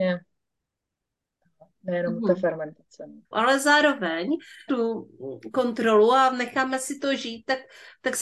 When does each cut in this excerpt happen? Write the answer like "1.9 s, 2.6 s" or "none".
3.3 s, 4.7 s